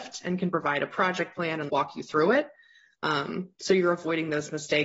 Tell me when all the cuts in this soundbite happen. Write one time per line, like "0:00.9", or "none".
0:01.7